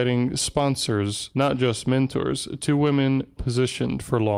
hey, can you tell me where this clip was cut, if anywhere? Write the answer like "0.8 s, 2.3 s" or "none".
3.4 s